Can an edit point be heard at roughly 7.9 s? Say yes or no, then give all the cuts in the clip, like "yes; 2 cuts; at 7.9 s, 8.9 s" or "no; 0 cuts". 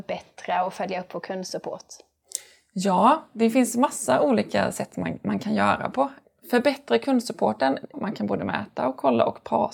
yes; 1 cut; at 7.9 s